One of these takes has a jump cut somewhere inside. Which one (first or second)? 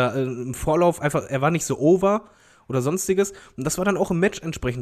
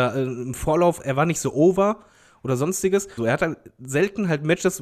second